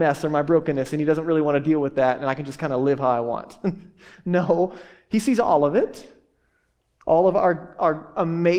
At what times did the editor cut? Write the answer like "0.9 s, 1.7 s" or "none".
none